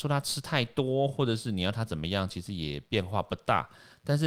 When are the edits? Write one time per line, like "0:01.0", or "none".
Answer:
none